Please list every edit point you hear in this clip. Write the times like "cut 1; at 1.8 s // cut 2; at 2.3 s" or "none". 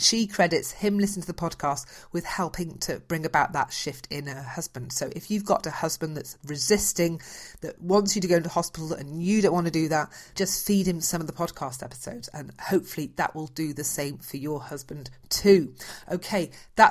cut 1; at 10.3 s